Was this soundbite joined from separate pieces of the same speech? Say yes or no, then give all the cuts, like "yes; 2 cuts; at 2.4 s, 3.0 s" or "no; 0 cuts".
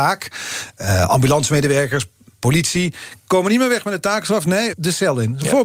yes; 1 cut; at 4.7 s